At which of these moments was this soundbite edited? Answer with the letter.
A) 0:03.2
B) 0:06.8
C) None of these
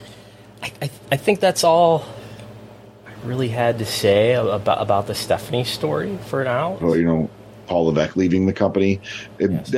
B